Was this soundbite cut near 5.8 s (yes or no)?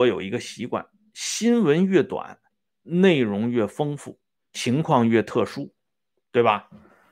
no